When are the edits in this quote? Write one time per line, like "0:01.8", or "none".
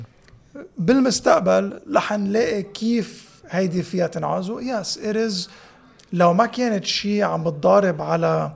none